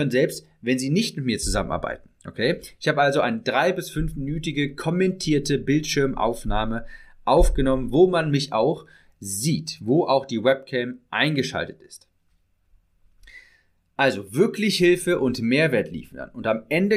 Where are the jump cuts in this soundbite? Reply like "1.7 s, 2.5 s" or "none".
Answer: none